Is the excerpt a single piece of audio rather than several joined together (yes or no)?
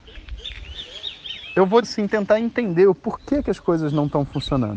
no